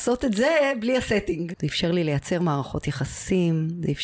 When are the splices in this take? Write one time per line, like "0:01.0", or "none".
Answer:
0:01.5